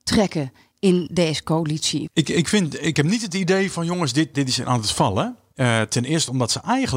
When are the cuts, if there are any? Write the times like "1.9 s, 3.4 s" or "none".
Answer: 2.1 s, 4.3 s